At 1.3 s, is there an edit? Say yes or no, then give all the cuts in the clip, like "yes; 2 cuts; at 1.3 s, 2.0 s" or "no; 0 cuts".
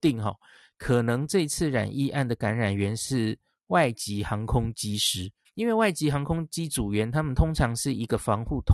no; 1 cut; at 5.4 s